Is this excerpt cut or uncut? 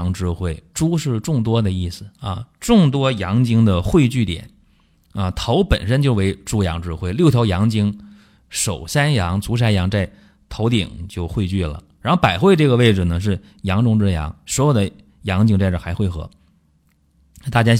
uncut